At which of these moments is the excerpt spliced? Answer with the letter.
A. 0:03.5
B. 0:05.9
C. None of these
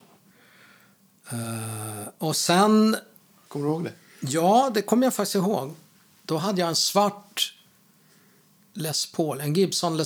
A